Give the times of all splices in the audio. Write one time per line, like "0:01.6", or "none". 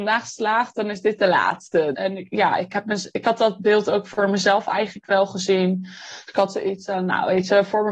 0:01.9